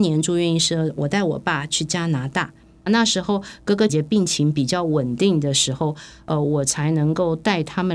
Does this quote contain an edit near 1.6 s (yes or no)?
no